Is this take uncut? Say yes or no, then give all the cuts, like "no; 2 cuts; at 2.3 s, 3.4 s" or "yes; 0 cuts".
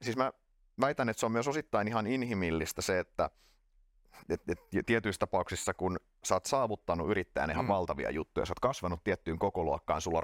no; 1 cut; at 4.2 s